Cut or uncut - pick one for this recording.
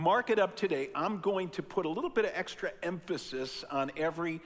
uncut